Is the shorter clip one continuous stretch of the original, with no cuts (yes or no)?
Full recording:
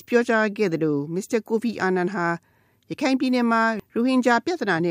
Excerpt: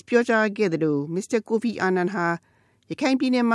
yes